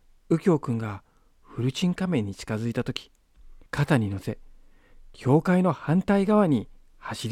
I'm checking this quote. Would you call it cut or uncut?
cut